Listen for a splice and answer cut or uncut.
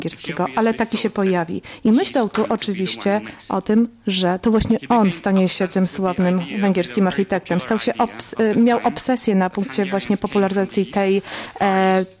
uncut